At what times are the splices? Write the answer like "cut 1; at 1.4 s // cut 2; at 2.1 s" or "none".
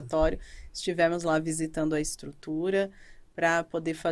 none